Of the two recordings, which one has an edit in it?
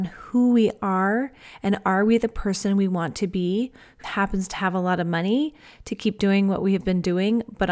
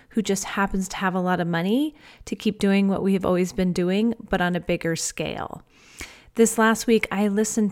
first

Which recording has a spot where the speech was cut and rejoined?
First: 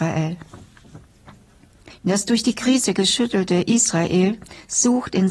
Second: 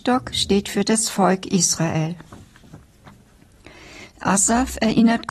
first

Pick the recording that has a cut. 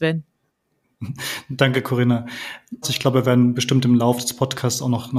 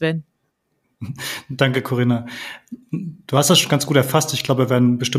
first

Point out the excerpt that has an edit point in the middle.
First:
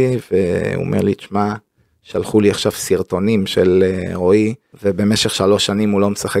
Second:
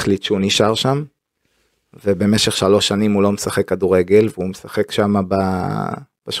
first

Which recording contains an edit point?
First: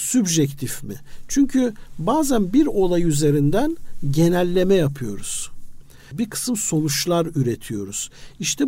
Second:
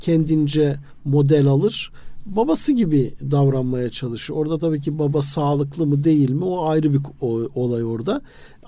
first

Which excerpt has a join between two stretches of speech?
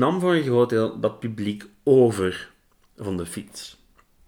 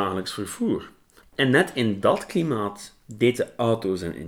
second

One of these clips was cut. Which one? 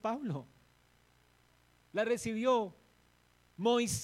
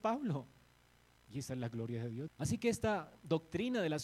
second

